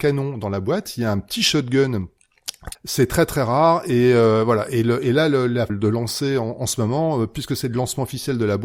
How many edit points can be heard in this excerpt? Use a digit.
2